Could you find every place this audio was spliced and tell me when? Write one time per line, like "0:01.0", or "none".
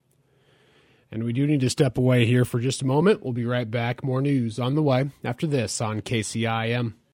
none